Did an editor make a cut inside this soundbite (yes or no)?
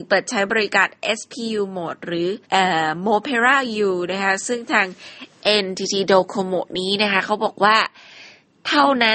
yes